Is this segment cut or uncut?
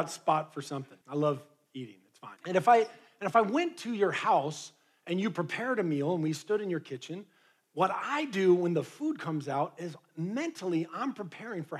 cut